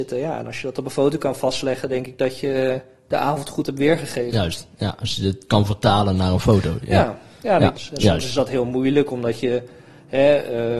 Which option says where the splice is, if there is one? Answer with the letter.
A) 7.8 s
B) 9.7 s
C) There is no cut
A